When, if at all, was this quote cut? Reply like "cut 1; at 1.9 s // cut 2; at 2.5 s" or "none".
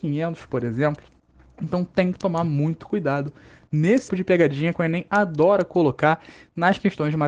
cut 1; at 4.1 s